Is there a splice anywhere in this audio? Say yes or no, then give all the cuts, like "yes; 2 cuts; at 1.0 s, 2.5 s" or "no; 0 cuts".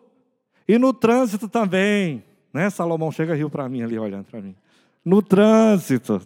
no; 0 cuts